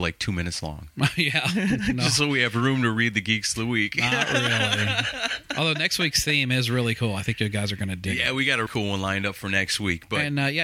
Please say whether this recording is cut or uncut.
cut